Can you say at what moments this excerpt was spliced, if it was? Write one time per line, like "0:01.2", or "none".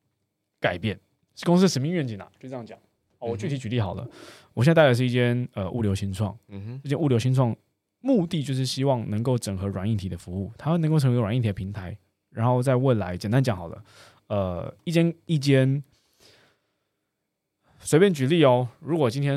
none